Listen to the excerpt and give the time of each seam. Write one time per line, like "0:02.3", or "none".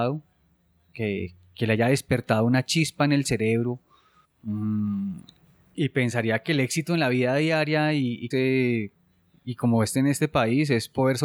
0:04.2
0:08.3

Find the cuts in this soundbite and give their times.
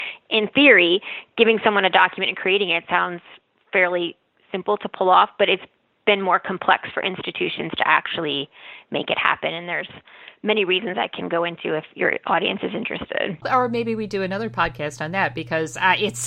none

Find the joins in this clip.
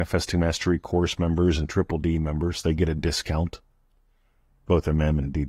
none

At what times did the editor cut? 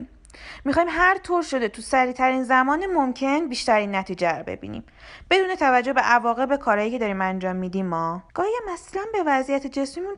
0:08.3

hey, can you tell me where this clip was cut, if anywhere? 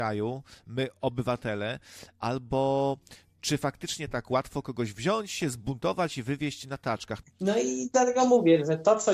0:07.2

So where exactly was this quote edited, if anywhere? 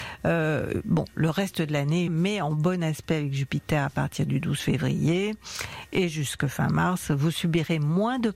0:02.1

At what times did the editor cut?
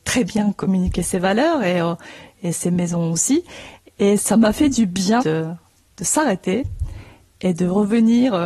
0:02.5
0:03.9
0:05.2

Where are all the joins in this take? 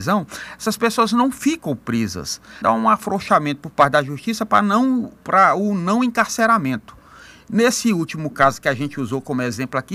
0:02.6

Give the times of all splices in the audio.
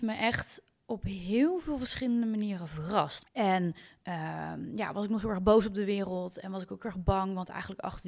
0:03.2

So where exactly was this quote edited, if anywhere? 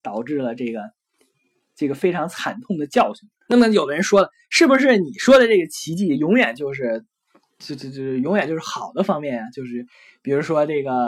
0:03.4

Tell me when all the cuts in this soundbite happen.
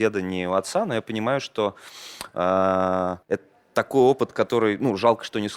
0:03.2

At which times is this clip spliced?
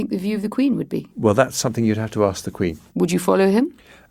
0:01.1
0:02.9

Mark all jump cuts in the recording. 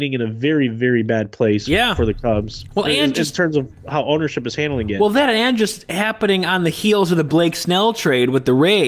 none

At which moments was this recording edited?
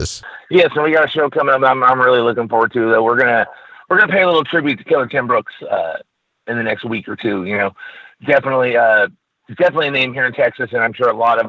none

